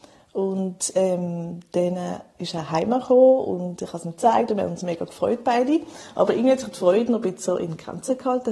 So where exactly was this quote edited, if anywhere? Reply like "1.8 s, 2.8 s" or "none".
none